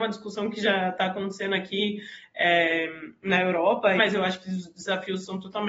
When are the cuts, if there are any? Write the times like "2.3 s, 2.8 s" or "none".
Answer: 4.0 s